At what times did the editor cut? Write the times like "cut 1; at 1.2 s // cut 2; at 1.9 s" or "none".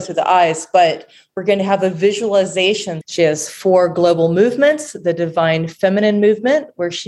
cut 1; at 3.0 s